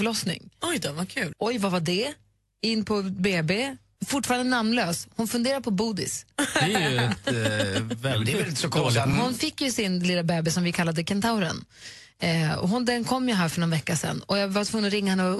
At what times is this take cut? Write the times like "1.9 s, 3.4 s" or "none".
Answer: 1.3 s, 4.0 s, 9.1 s